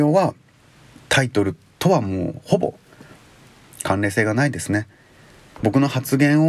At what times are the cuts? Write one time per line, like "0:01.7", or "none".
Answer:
0:05.6